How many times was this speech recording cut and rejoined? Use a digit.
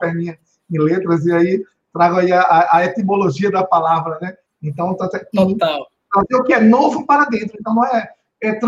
1